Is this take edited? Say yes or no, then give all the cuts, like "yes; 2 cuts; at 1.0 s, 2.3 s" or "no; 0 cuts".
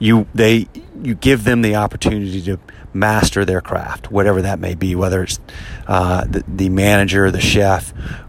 no; 0 cuts